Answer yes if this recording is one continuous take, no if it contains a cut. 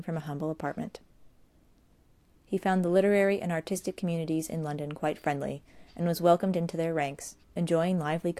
yes